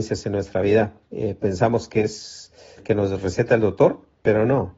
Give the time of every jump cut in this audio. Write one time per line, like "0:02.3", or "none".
0:01.0
0:02.8